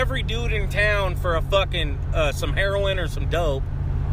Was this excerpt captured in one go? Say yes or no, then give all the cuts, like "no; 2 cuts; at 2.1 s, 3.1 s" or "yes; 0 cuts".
yes; 0 cuts